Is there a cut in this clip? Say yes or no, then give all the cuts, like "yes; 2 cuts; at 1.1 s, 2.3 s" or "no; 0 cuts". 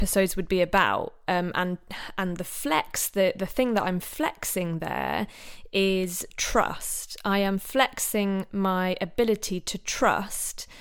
no; 0 cuts